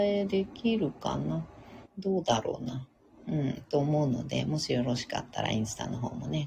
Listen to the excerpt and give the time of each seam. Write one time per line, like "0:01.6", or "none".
0:01.8